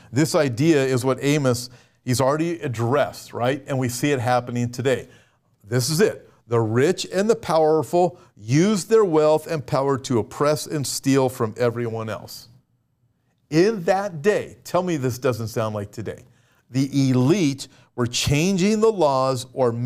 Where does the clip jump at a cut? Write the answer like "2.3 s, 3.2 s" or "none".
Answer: none